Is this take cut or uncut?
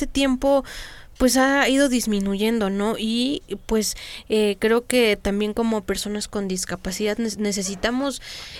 uncut